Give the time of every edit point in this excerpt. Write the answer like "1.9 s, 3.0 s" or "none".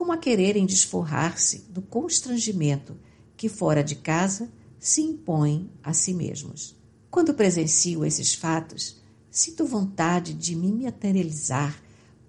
7.0 s